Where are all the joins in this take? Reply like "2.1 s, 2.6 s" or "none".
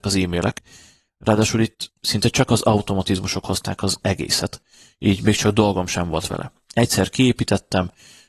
none